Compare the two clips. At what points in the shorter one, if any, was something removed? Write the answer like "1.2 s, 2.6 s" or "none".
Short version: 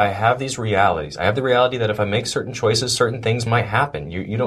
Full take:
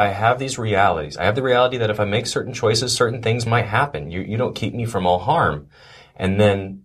none